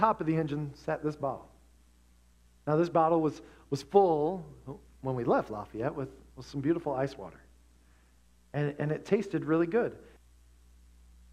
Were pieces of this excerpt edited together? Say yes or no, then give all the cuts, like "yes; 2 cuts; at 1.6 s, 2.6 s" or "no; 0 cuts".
yes; 1 cut; at 10.2 s